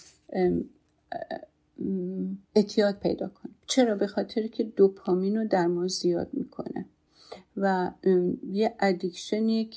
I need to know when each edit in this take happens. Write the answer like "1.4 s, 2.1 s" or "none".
2.4 s, 3.6 s